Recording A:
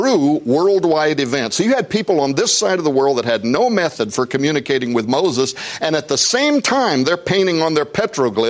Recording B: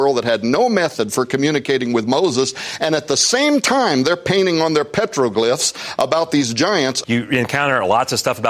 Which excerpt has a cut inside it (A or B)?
B